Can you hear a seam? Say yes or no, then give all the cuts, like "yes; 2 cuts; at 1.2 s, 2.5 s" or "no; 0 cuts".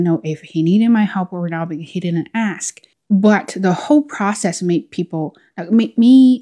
yes; 1 cut; at 2.9 s